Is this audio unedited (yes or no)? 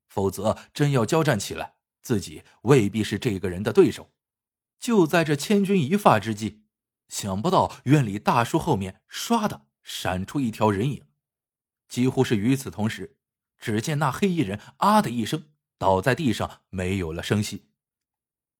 no